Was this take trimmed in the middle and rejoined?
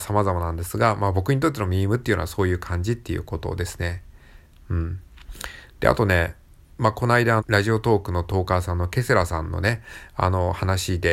yes; 1 cut; at 7.4 s

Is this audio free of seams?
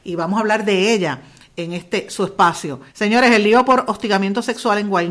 no; 1 cut; at 2.9 s

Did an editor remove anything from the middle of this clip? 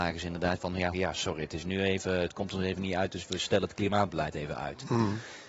yes; 1 cut; at 0.9 s

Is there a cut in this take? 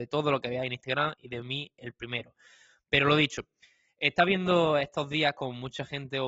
no; 0 cuts

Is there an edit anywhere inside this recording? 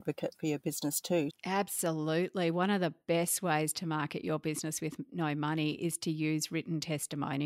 yes; 1 cut; at 1.3 s

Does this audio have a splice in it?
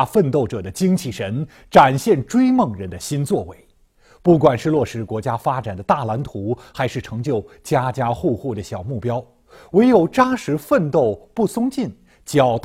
no; 0 cuts

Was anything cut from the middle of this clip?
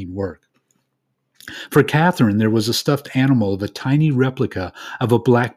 no; 0 cuts

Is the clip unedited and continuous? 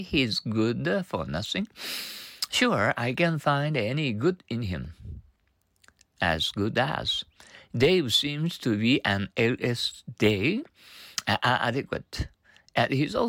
yes; 0 cuts

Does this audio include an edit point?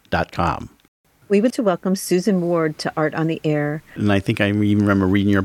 yes; 2 cuts; at 1.5 s, 4.0 s

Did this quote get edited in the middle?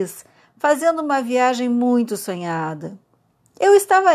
no; 0 cuts

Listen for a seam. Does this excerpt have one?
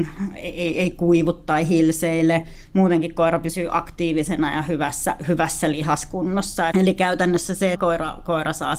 yes; 2 cuts; at 6.7 s, 7.7 s

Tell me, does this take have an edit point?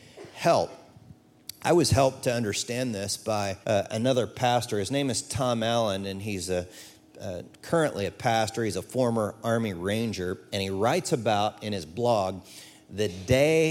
yes; 1 cut; at 3.6 s

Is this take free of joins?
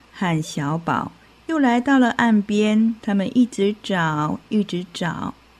no; 1 cut; at 3.0 s

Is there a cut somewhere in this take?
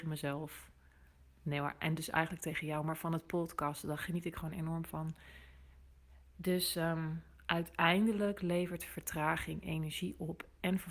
no; 0 cuts

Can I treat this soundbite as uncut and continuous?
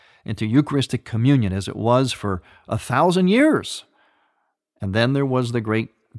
yes; 0 cuts

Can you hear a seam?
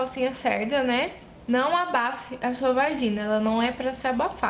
yes; 1 cut; at 1.4 s

